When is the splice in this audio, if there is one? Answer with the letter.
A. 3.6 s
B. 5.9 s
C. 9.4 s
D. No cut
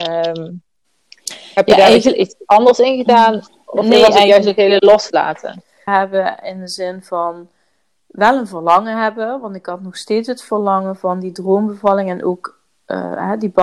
B